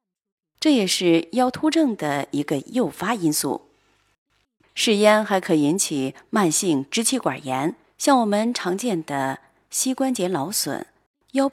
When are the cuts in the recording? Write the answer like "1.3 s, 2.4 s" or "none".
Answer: 4.6 s, 7.8 s